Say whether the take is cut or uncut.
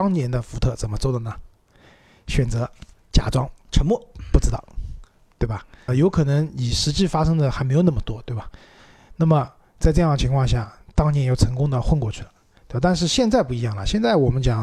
cut